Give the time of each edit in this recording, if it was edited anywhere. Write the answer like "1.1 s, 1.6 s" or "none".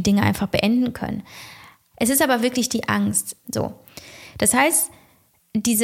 1.9 s, 3.4 s